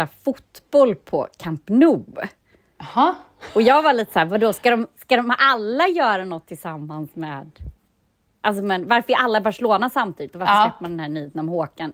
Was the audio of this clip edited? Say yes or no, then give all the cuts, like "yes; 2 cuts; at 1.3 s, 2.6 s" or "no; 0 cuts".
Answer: no; 0 cuts